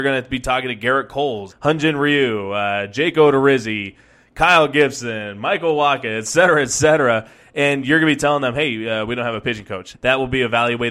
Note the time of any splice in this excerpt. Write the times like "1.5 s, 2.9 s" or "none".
1.5 s, 9.9 s